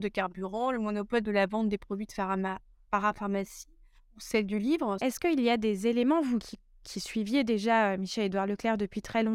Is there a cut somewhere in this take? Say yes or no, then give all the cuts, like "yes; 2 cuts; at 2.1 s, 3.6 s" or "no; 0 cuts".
yes; 1 cut; at 5.0 s